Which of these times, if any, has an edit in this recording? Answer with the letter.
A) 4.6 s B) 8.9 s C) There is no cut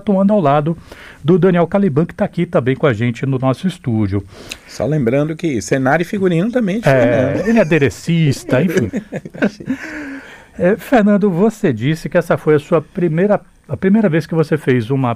B